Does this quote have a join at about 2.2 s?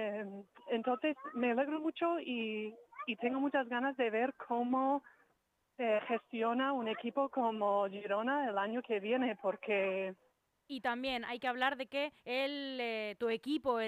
no; 2 cuts; at 10.7 s, 12.2 s

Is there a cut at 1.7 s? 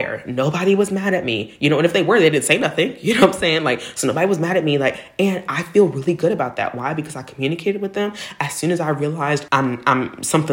no; 1 cut; at 9.5 s

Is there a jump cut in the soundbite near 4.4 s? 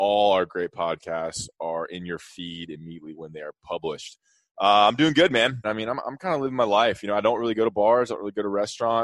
no; 1 cut; at 5.6 s

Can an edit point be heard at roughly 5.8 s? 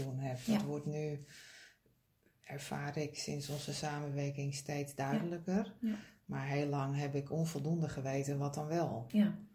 no; 0 cuts

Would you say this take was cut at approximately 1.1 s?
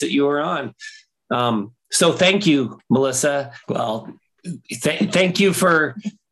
no; 1 cut; at 3.6 s

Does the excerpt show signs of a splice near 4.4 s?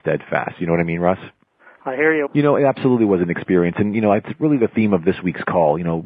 no; 1 cut; at 2.3 s

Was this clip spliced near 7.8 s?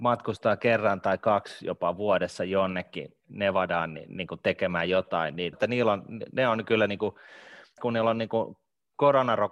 yes; 2 cuts; at 5.5 s, 7.8 s

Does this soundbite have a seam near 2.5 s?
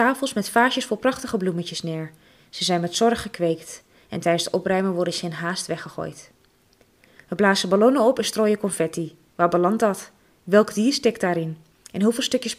no; 0 cuts

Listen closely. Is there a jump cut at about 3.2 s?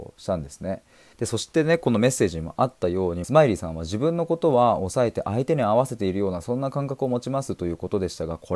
yes; 2 cuts; at 1.1 s, 3.2 s

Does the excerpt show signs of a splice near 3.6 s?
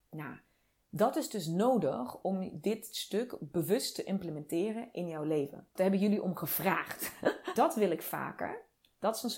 no; 2 cuts; at 5.8 s, 7.6 s

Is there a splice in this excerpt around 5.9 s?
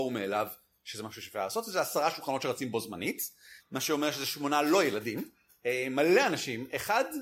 no; 1 cut; at 3.6 s

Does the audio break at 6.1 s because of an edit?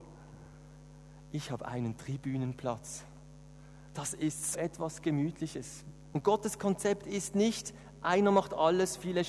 yes; 2 cuts; at 4.5 s, 6.1 s

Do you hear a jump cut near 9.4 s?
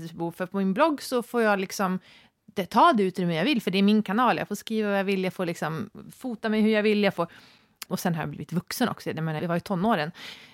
yes; 2 cuts; at 7.9 s, 9.4 s

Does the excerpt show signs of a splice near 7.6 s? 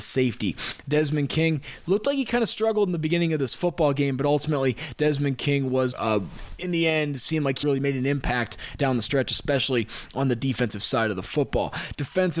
yes; 2 cuts; at 5.9 s, 7.6 s

